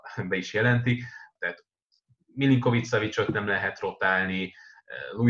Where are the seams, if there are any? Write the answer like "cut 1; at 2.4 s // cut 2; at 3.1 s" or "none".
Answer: cut 1; at 1.4 s